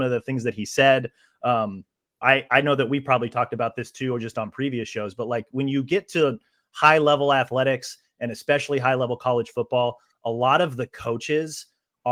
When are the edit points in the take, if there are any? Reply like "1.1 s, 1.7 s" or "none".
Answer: 2.2 s